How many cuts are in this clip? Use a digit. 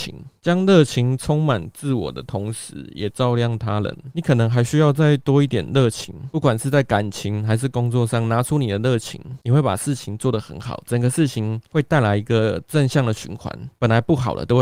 0